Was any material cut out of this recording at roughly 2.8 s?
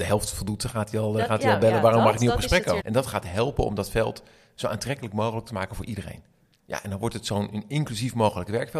yes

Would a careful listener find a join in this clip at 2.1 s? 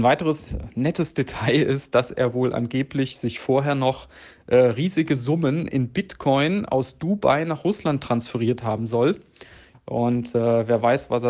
no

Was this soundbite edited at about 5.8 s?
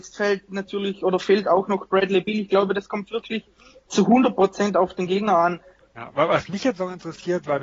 yes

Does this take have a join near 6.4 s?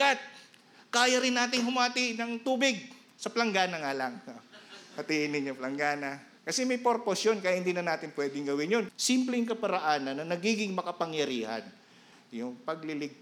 yes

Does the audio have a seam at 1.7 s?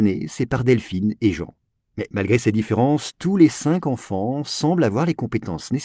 no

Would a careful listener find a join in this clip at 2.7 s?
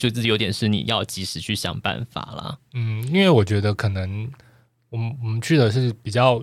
no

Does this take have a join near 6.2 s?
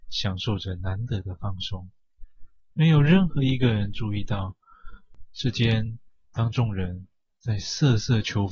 yes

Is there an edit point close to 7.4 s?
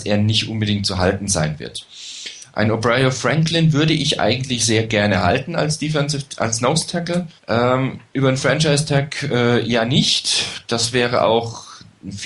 yes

